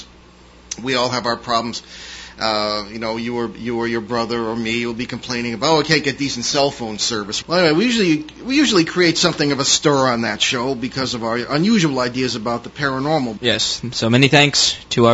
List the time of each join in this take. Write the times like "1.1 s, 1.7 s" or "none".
7.4 s, 13.4 s